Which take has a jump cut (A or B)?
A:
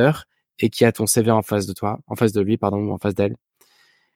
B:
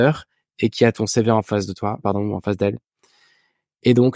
B